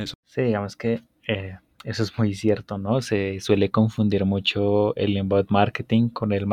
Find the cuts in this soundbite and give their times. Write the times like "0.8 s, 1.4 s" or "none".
none